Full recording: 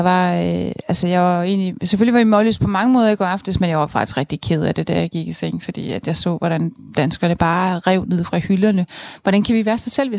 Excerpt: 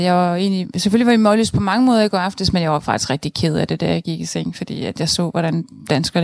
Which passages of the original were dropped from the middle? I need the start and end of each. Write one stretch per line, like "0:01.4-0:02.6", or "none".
none